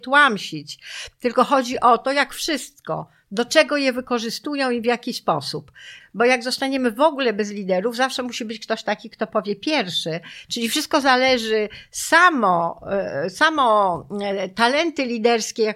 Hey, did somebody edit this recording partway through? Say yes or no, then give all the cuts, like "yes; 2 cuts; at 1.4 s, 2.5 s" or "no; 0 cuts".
yes; 2 cuts; at 6.0 s, 10.4 s